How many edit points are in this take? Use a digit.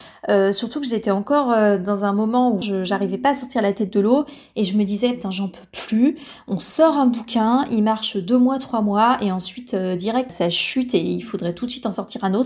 2